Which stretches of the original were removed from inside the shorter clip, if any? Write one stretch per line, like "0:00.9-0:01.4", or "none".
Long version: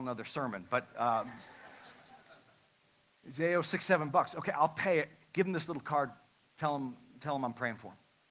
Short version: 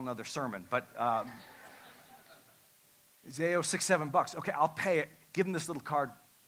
none